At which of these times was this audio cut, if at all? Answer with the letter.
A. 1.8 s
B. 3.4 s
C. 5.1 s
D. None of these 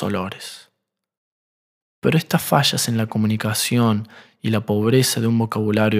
A